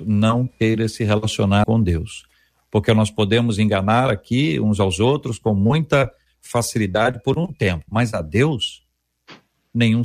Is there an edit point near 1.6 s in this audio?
yes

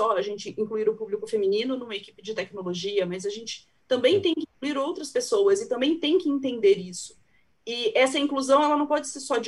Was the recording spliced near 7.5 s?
no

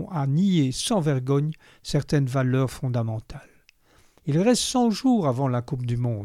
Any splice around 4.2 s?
yes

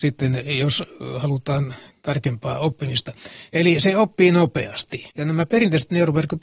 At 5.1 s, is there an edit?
yes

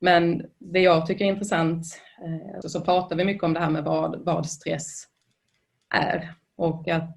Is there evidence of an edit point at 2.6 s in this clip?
yes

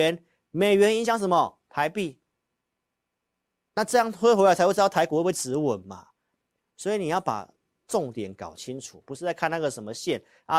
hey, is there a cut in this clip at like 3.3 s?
no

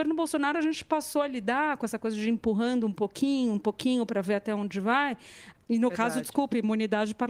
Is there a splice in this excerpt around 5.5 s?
yes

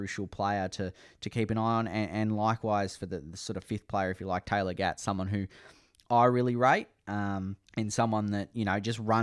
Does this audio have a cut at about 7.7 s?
yes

